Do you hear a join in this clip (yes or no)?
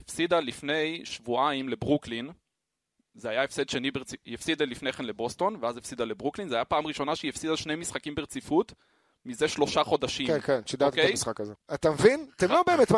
yes